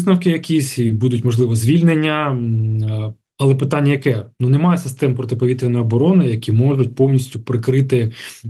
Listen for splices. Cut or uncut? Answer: uncut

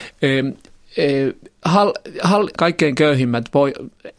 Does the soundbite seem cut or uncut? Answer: cut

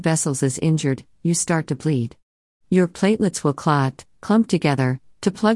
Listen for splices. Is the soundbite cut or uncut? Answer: uncut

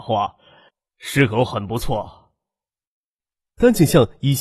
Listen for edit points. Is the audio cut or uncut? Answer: uncut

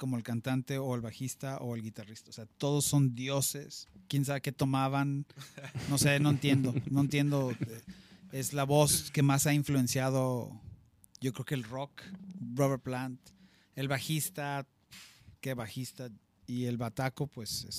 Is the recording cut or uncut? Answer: uncut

